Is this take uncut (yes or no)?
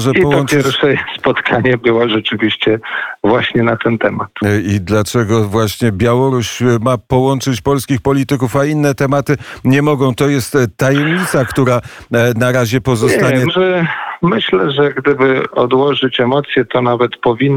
no